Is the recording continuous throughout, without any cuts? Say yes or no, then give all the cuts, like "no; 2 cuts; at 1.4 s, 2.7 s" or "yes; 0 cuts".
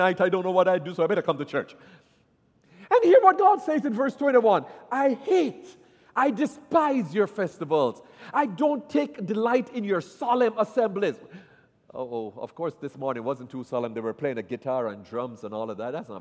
yes; 0 cuts